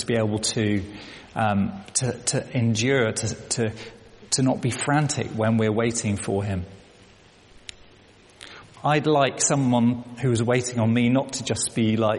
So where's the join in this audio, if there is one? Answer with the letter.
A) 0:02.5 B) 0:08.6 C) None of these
B